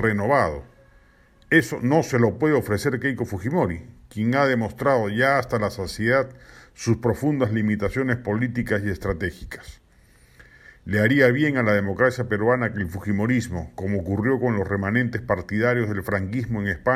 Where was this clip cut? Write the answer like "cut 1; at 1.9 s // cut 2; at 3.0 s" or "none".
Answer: none